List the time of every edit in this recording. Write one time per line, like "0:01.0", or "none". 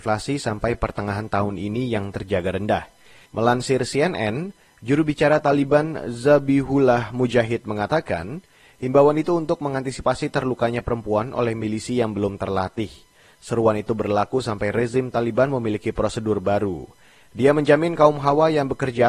0:03.3